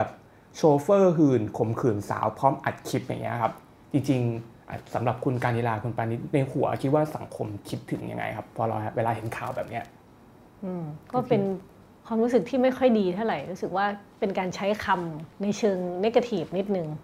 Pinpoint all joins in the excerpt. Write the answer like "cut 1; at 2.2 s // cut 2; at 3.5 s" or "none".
cut 1; at 11.0 s // cut 2; at 15.3 s